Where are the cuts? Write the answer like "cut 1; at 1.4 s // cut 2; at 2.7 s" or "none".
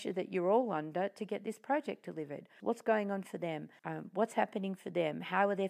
cut 1; at 2.6 s // cut 2; at 3.8 s